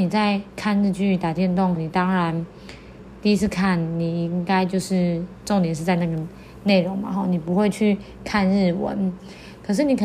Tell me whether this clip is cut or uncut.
cut